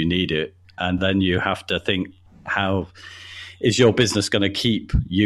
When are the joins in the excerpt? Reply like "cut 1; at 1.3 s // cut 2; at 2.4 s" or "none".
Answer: none